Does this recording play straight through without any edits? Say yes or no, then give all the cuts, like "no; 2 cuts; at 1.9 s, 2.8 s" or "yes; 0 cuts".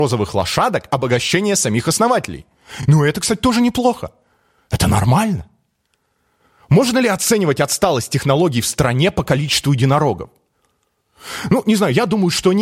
yes; 0 cuts